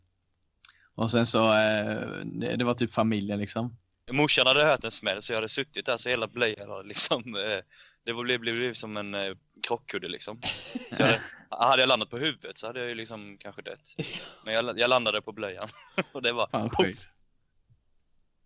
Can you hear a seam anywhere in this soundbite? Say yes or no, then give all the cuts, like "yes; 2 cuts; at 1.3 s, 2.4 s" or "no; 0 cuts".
yes; 1 cut; at 4.1 s